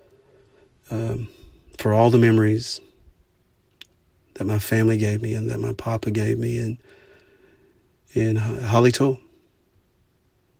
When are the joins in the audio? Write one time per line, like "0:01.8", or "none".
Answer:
none